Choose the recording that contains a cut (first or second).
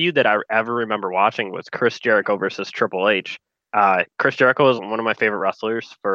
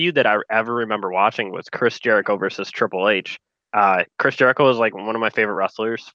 first